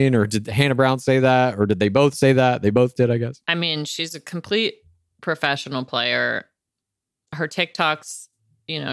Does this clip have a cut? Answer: no; 0 cuts

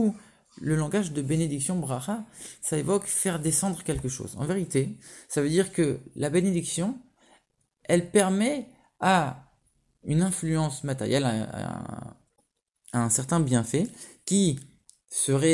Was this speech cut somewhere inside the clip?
no; 0 cuts

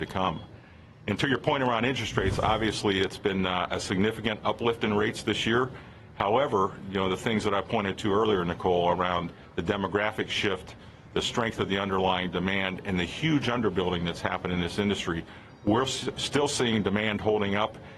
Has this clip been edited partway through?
no; 0 cuts

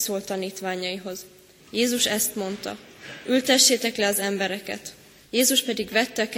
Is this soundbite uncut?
no; 2 cuts; at 1.6 s, 5.2 s

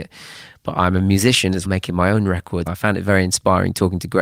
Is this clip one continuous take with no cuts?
no; 2 cuts; at 1.6 s, 2.7 s

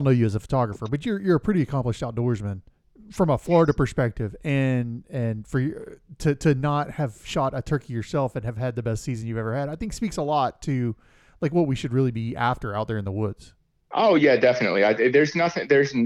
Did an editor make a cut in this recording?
no; 0 cuts

